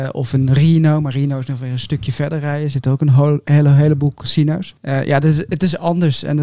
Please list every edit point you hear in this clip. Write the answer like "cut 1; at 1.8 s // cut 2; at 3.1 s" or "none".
cut 1; at 4.8 s